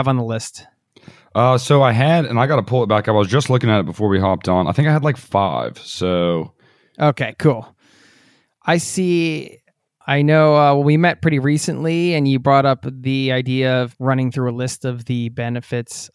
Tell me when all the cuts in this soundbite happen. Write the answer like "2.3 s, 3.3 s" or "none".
10.0 s, 13.9 s